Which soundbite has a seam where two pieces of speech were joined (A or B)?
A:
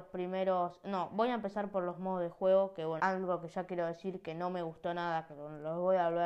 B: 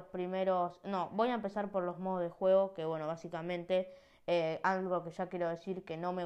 A